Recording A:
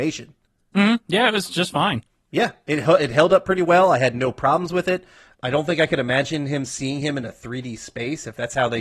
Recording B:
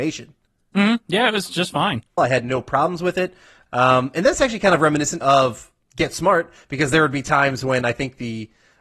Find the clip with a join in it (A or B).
B